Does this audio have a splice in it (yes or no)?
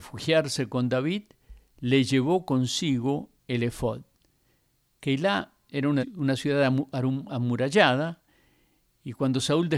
yes